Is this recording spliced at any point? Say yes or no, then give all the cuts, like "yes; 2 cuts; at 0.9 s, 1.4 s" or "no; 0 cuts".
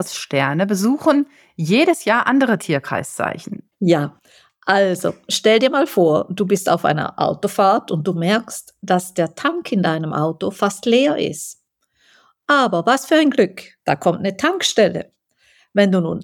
yes; 1 cut; at 3.7 s